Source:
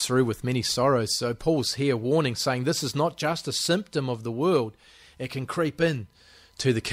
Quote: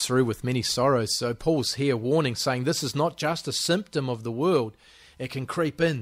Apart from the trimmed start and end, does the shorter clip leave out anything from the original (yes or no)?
no